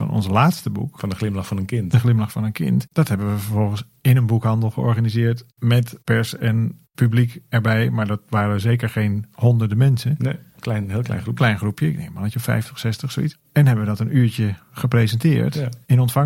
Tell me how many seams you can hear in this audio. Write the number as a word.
zero